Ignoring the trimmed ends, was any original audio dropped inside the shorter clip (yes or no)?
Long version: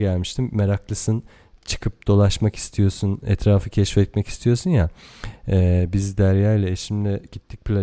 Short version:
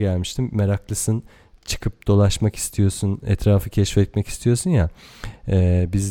no